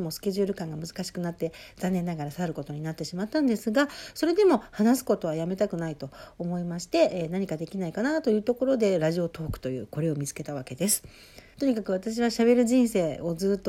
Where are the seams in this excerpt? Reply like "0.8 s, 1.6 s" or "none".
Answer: 11.5 s